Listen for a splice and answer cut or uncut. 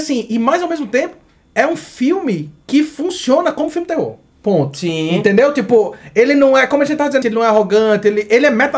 cut